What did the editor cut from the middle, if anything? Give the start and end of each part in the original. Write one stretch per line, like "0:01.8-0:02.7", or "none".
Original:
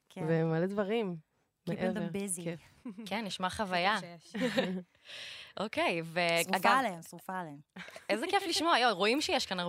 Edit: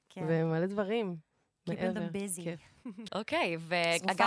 0:03.1-0:05.5